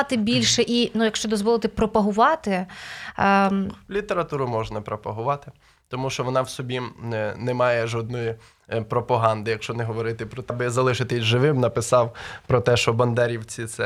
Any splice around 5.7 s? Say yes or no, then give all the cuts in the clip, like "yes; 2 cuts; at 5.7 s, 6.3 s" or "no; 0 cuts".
no; 1 cut; at 10.5 s